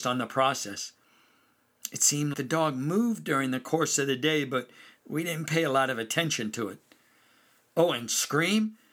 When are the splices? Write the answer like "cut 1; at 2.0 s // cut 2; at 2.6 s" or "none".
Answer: cut 1; at 2.3 s